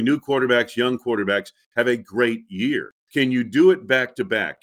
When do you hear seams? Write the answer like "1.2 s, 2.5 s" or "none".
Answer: 3.0 s